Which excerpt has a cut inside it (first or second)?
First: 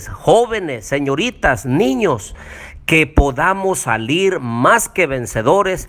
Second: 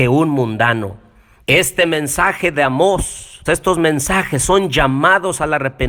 second